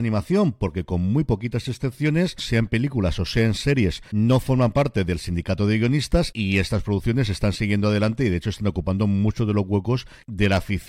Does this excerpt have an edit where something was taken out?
yes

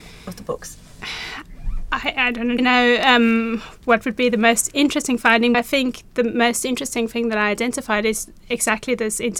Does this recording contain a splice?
yes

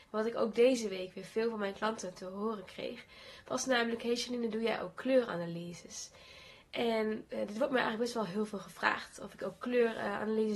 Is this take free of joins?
yes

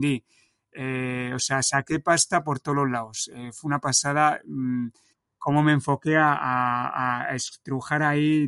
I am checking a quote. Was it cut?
no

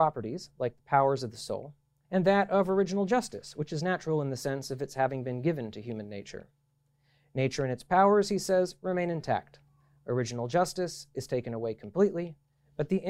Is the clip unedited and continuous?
no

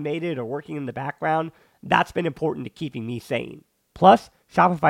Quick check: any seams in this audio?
yes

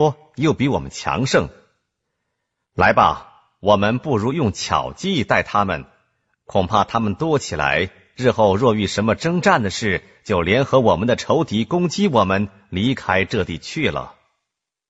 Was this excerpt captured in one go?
yes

